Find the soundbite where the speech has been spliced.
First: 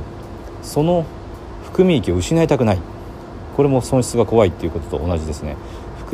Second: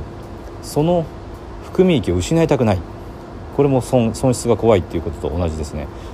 first; 1 cut; at 3.8 s

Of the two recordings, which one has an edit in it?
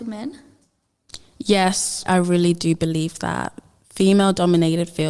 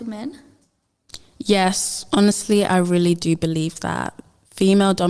first; 1 cut; at 2.1 s

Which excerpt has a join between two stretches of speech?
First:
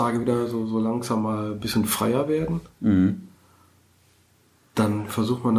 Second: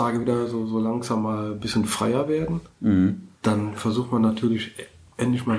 second; 1 cut; at 3.3 s

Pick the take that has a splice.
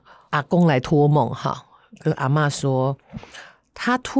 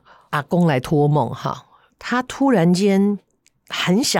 second; 1 cut; at 1.9 s

